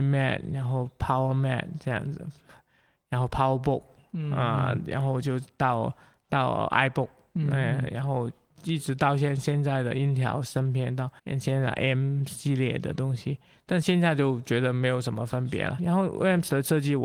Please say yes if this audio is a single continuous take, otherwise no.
no